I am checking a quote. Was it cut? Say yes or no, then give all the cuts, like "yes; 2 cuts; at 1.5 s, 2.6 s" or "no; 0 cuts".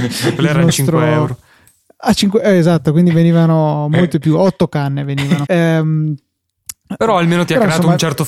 yes; 2 cuts; at 5.5 s, 7.0 s